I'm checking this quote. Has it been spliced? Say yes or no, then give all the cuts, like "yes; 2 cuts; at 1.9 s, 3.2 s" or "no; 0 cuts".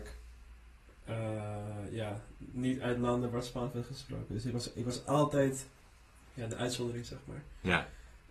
no; 0 cuts